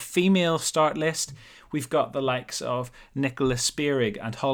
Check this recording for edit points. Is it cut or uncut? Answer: uncut